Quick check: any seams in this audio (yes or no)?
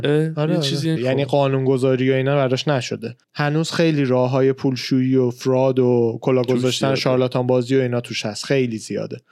yes